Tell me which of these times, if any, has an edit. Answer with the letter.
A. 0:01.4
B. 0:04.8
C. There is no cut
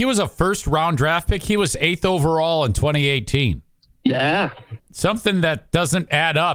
B